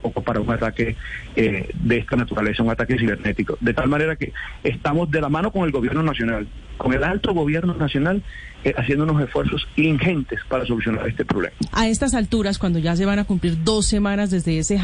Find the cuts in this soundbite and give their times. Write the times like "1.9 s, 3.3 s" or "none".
11.7 s